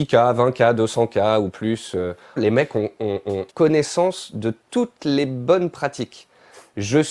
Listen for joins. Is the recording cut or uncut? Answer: cut